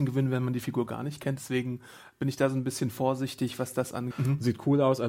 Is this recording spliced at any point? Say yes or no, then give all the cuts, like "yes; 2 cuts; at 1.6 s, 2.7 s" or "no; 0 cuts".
yes; 2 cuts; at 1.4 s, 4.1 s